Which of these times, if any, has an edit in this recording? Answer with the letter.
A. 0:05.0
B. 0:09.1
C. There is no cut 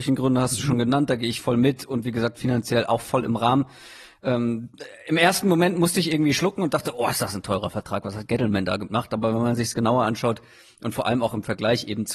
C